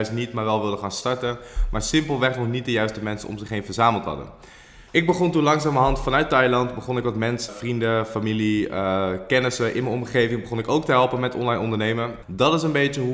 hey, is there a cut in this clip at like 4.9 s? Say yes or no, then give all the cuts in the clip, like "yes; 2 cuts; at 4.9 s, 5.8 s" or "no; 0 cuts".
yes; 3 cuts; at 4.9 s, 7.5 s, 12.2 s